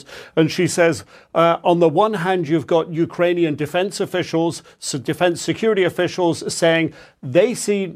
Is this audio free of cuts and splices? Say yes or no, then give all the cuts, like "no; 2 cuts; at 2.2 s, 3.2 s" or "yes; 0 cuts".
yes; 0 cuts